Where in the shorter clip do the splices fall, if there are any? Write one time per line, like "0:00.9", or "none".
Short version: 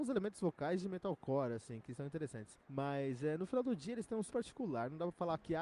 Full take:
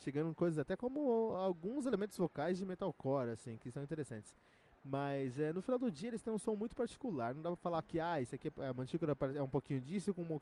0:02.6
0:04.3